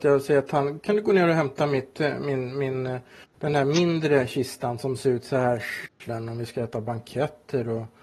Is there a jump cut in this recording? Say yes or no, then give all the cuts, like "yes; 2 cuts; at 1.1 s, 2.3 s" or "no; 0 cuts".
yes; 1 cut; at 6.1 s